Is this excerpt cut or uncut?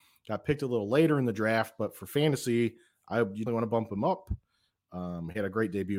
cut